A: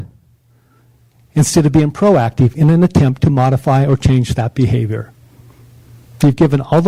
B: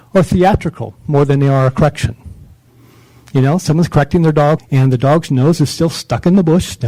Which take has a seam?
B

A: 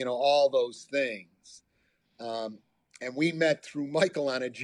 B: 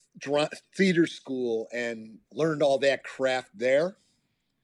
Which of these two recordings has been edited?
B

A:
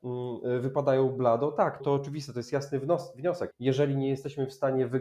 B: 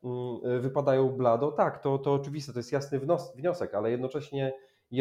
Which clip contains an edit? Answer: A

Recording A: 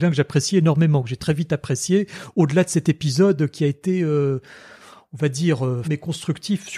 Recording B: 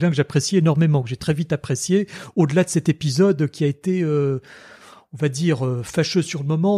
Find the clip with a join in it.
A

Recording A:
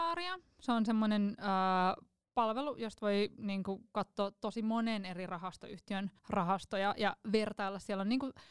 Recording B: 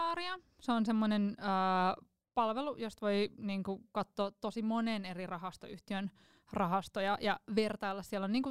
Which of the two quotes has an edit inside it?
A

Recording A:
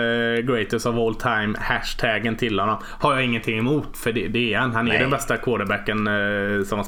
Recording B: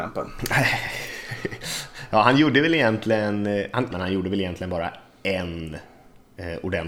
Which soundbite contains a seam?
B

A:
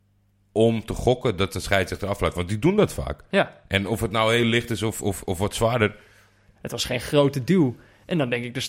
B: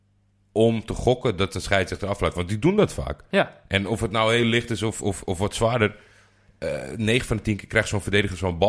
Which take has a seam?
A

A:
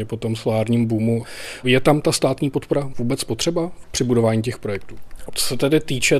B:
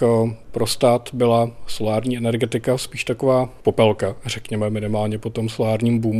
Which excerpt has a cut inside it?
A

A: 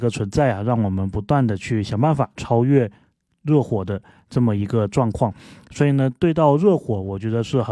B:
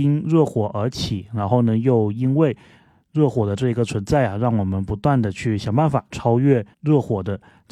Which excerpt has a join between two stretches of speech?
B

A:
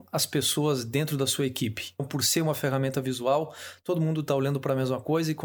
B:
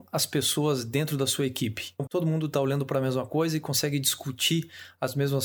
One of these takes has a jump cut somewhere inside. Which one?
B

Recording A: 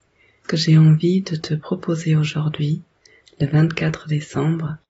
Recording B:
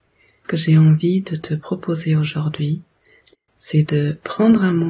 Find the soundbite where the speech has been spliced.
B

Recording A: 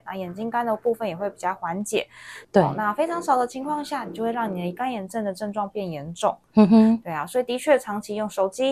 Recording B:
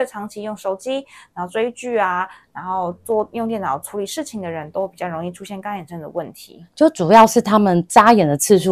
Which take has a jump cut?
A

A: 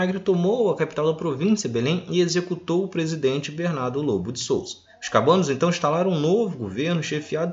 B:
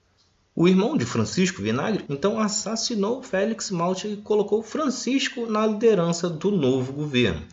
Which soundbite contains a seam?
B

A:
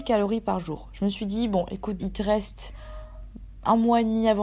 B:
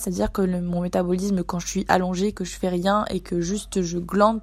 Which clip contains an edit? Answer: A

